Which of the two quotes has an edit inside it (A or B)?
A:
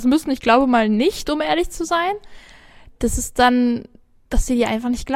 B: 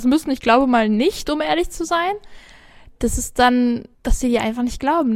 B